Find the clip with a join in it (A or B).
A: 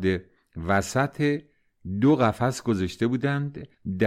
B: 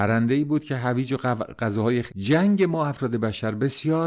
B